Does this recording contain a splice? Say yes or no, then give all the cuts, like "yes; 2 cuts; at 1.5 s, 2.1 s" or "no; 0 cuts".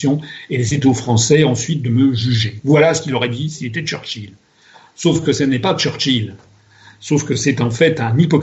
no; 0 cuts